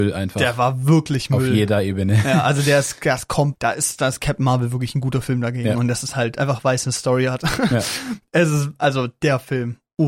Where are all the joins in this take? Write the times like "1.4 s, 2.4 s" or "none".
3.5 s